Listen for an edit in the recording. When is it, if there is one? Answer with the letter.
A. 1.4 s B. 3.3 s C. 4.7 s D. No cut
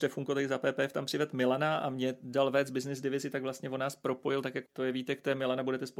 C